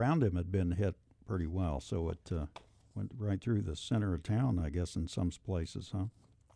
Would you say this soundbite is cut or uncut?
uncut